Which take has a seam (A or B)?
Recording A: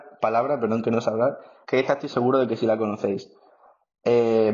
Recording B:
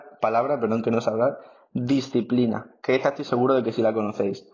A